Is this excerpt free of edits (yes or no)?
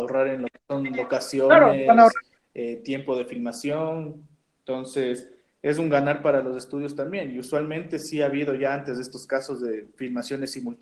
yes